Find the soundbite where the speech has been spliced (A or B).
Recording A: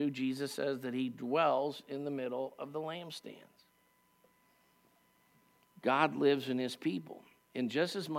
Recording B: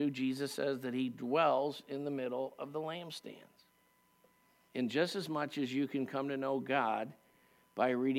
B